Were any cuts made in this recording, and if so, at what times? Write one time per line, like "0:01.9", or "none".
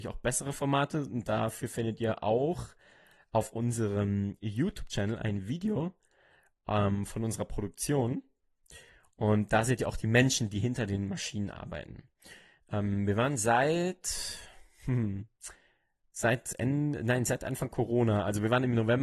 none